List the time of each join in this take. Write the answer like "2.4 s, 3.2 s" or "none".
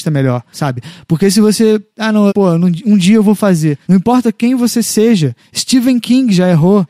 2.3 s, 3.8 s